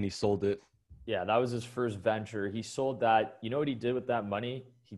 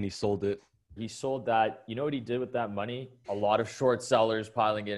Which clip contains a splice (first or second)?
second